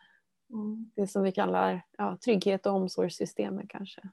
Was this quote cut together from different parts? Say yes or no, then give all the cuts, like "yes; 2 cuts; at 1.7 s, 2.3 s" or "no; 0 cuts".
yes; 1 cut; at 2.2 s